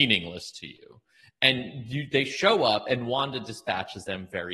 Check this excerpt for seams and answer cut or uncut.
uncut